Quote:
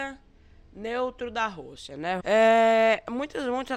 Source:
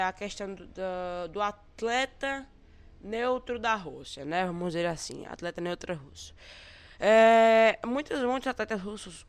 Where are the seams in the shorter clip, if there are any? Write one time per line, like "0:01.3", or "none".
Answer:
0:02.2